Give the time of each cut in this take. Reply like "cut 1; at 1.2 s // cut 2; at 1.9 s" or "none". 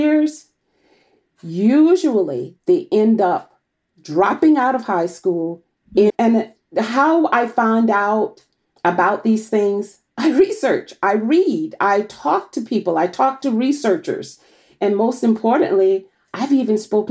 cut 1; at 6.1 s